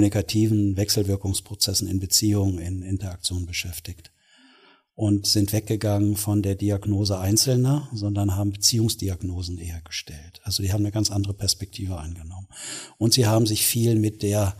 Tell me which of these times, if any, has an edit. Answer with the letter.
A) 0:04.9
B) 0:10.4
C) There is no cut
C